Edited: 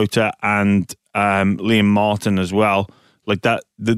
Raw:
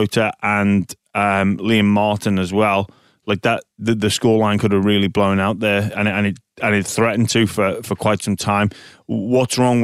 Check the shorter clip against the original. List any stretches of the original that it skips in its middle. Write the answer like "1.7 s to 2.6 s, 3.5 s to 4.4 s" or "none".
none